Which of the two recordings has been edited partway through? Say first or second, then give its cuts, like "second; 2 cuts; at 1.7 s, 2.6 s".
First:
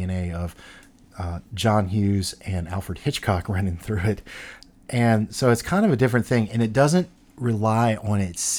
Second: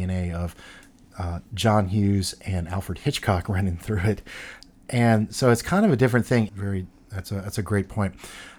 second; 1 cut; at 6.5 s